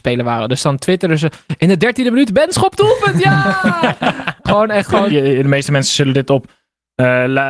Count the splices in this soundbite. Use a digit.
1